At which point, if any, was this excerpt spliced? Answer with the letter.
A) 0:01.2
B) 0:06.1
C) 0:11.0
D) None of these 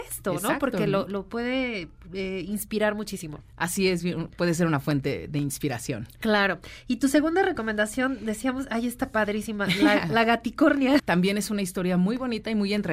C